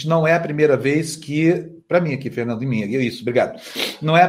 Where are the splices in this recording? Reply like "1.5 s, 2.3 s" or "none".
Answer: none